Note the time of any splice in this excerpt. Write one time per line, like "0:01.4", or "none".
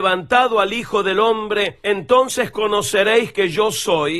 none

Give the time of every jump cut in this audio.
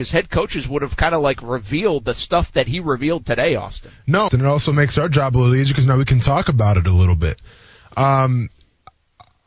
0:04.3

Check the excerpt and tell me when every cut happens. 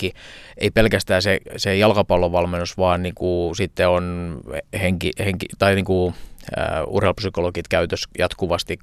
none

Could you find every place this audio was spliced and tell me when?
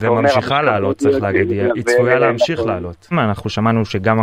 0:03.1

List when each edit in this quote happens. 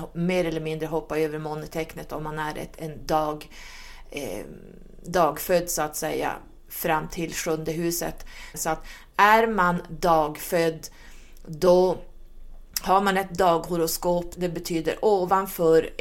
0:08.5
0:14.4

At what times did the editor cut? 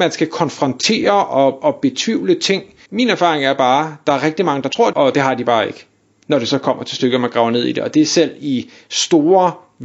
0:02.9
0:04.9

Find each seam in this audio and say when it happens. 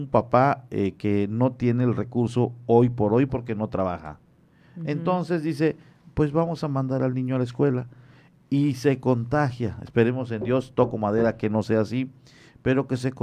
none

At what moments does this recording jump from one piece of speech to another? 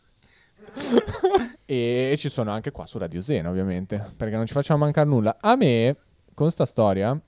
0:01.5

